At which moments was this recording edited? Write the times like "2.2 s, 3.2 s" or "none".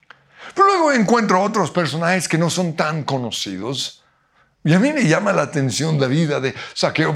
4.5 s